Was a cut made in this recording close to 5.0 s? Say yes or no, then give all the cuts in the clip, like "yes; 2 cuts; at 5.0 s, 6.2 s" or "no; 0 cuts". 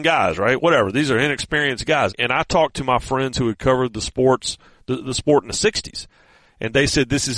no; 1 cut; at 2.1 s